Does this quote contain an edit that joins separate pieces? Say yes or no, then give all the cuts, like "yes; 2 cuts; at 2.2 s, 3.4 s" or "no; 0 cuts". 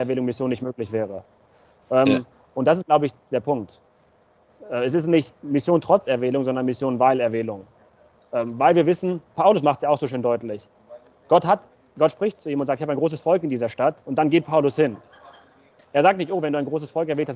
no; 0 cuts